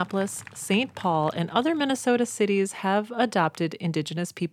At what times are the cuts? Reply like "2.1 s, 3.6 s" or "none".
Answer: none